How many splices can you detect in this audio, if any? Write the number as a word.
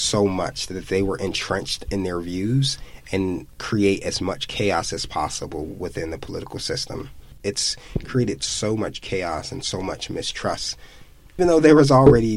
two